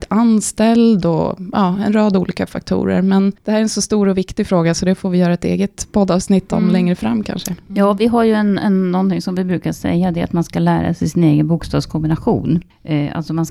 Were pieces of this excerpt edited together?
no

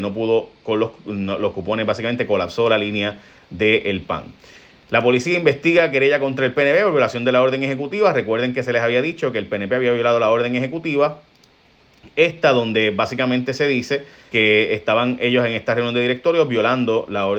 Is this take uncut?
no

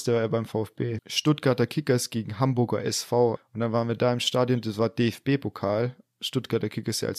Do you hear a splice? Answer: yes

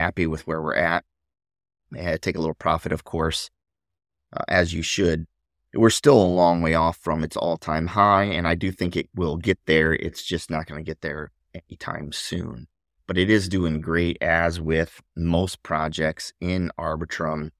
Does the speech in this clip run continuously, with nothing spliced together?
yes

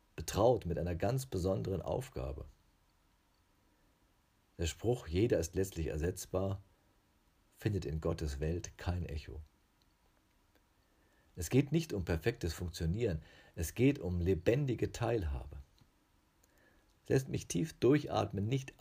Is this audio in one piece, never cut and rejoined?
yes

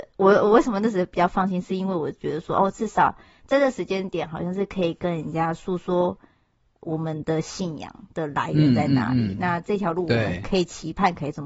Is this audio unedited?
yes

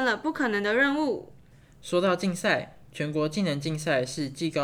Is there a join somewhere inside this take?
no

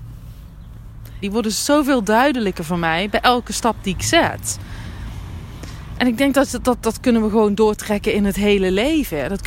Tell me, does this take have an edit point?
yes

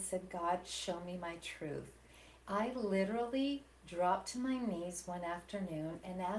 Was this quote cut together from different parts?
yes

